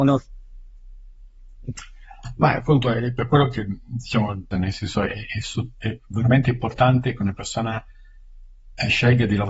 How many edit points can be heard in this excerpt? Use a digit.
1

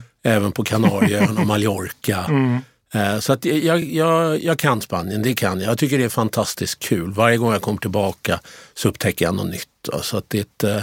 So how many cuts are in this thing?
0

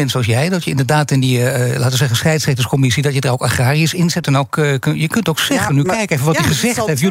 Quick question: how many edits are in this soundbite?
1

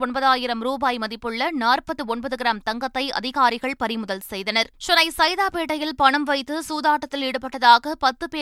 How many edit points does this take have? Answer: 1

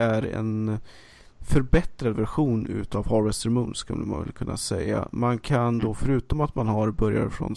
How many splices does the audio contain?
0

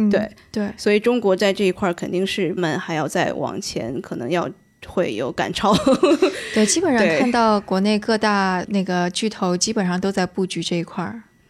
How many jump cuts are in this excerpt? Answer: 1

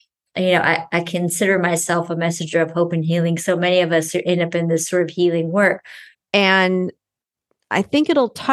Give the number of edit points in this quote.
1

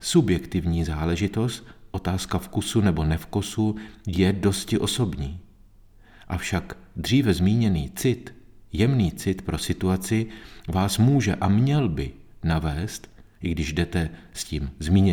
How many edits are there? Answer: 1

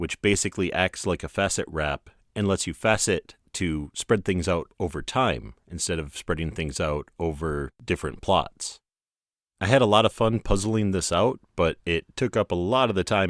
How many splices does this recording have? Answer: 0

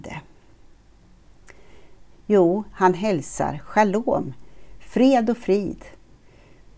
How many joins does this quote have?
1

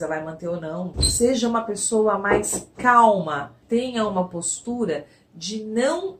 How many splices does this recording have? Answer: 2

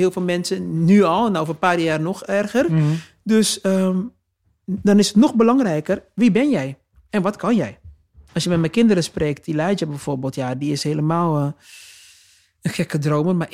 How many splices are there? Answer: 1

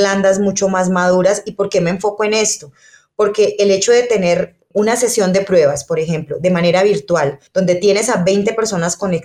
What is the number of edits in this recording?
0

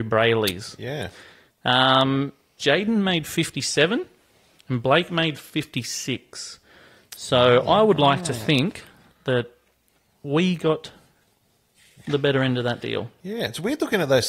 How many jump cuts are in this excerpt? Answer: 1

